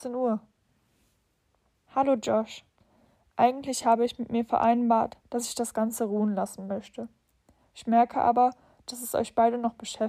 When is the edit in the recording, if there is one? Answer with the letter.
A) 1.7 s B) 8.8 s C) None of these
A